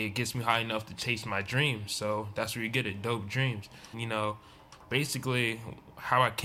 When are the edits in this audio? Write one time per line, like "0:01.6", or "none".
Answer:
0:03.9